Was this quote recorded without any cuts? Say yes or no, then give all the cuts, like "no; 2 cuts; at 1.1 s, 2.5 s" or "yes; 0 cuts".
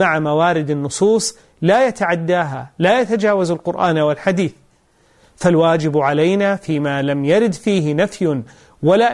yes; 0 cuts